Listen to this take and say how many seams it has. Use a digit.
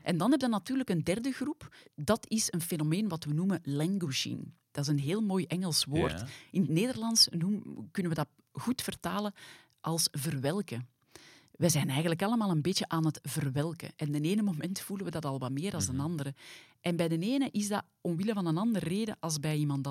0